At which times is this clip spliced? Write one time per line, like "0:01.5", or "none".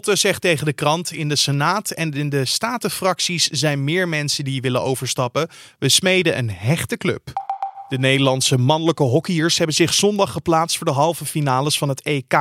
none